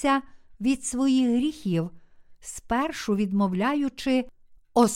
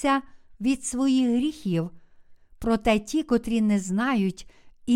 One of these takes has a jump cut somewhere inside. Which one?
second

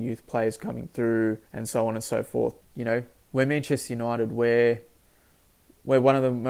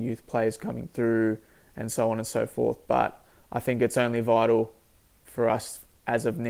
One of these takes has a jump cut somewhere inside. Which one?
first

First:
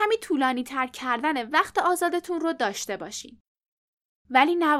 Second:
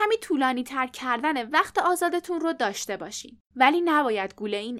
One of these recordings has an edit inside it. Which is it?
second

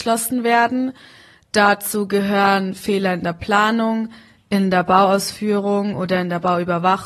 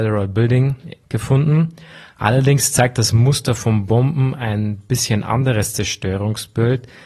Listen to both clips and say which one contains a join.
second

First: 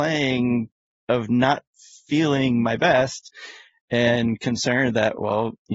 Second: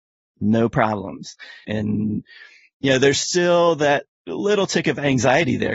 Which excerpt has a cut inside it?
second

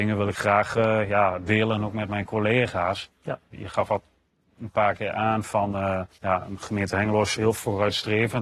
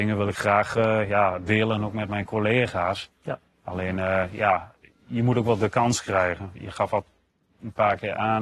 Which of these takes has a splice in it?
first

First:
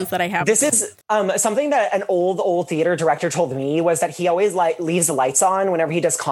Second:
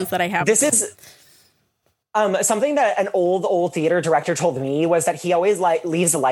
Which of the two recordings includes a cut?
first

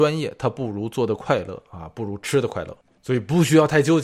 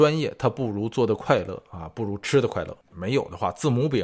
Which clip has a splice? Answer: second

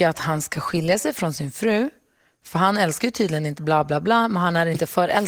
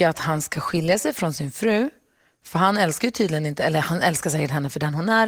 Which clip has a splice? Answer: first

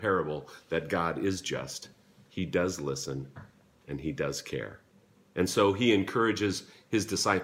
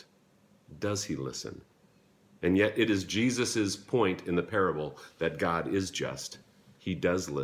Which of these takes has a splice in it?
second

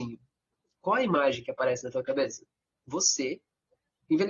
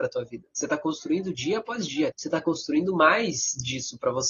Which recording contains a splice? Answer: second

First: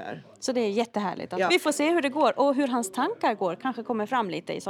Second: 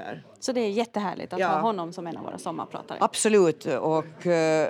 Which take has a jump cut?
first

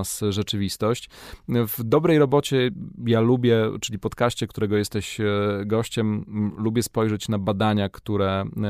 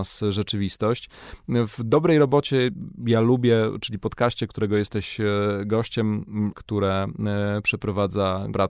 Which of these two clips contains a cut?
second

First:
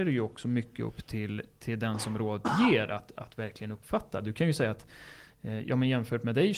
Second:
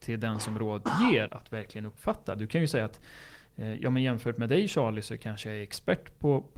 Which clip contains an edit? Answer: second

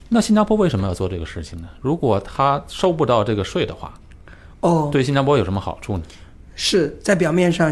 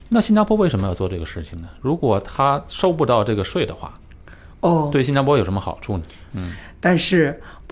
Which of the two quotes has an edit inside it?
second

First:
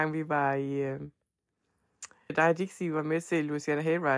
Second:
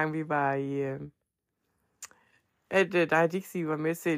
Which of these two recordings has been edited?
first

